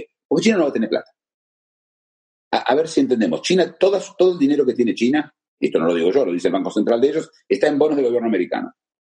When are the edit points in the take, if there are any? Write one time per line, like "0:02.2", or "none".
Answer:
none